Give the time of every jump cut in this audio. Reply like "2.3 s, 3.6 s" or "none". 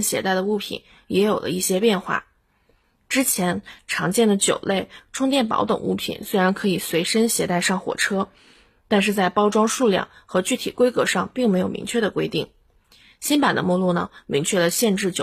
none